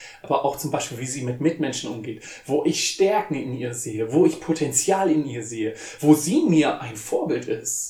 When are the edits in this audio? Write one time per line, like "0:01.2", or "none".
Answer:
none